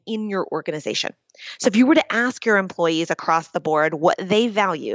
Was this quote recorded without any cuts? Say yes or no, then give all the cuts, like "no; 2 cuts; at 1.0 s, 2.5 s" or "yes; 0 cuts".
yes; 0 cuts